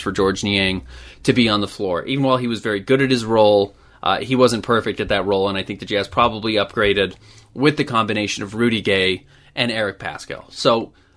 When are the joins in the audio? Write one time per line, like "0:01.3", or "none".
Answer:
none